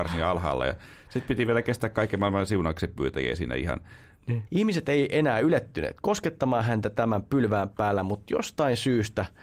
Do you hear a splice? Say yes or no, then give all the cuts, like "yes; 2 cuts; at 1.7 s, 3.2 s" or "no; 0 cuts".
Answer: yes; 1 cut; at 4.5 s